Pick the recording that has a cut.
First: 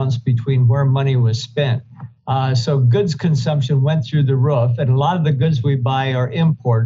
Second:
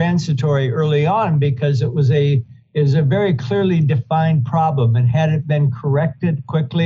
first; 1 cut; at 2.2 s

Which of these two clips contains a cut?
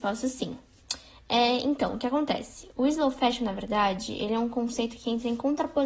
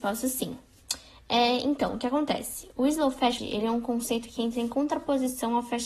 second; 1 cut; at 3.4 s

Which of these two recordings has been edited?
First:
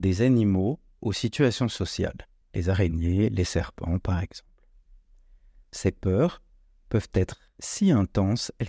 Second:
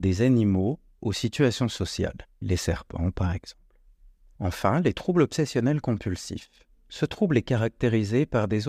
second; 3 cuts; at 2.4 s, 4.4 s, 6.8 s

